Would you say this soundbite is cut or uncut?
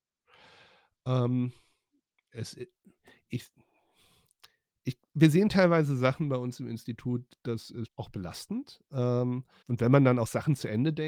cut